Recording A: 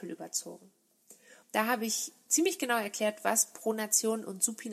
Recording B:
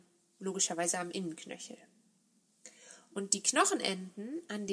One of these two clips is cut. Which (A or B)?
A